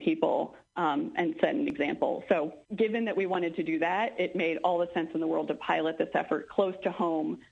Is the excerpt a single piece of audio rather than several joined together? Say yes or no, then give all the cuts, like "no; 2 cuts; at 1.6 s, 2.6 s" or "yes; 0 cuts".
no; 1 cut; at 2.6 s